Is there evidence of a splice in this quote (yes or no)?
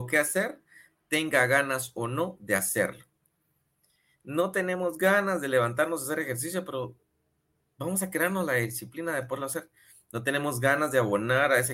no